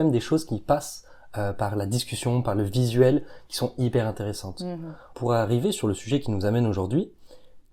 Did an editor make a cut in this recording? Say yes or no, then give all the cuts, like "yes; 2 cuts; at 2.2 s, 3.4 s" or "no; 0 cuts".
yes; 1 cut; at 5.1 s